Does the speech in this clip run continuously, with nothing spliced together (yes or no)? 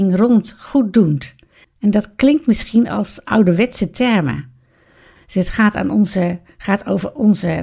no